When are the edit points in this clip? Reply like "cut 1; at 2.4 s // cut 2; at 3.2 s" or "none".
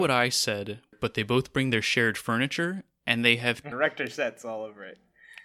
cut 1; at 0.9 s // cut 2; at 3.7 s